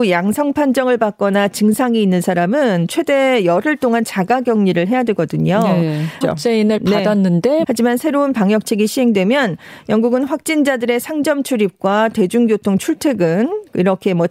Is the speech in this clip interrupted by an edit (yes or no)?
yes